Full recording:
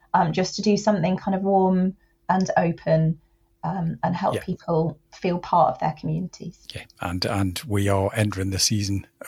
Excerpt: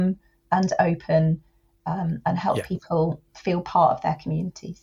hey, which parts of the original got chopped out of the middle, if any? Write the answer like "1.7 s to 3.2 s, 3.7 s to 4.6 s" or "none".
none